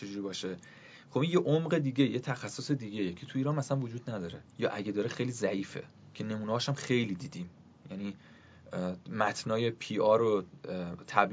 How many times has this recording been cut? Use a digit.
1